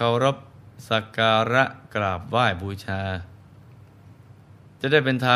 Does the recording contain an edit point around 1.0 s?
no; 0 cuts

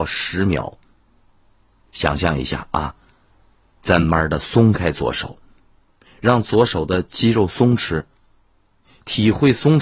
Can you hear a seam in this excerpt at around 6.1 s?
no; 1 cut; at 4.0 s

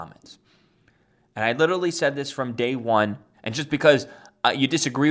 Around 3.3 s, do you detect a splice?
yes; 1 cut; at 3.3 s

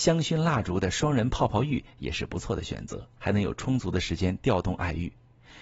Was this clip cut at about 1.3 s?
no; 1 cut; at 3.2 s

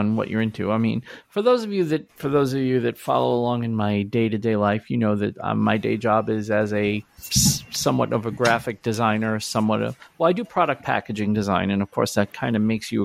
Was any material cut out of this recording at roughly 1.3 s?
no; 0 cuts

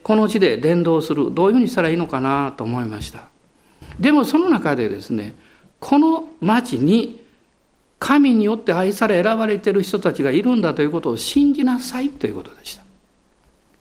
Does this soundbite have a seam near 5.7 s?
yes; 1 cut; at 5.7 s

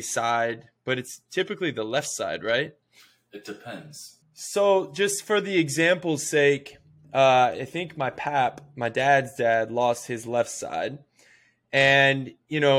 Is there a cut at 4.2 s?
yes; 1 cut; at 4.2 s

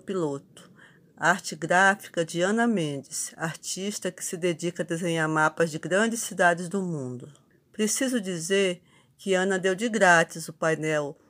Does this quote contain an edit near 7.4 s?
no; 0 cuts

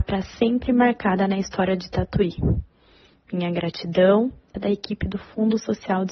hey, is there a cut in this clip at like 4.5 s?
yes; 1 cut; at 4.5 s

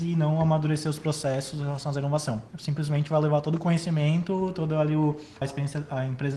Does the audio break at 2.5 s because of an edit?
yes; 2 cuts; at 2.5 s, 5.4 s

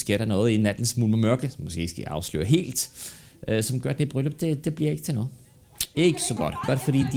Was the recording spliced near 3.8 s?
no; 1 cut; at 5.9 s

